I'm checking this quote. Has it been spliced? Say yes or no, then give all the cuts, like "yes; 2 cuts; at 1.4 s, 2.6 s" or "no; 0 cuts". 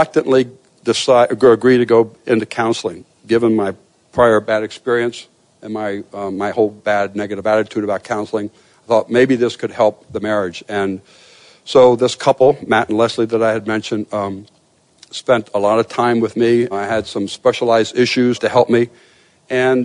yes; 2 cuts; at 16.7 s, 18.3 s